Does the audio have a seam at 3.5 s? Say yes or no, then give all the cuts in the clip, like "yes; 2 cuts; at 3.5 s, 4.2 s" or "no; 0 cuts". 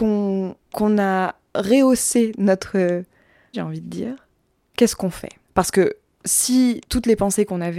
yes; 2 cuts; at 3.5 s, 5.4 s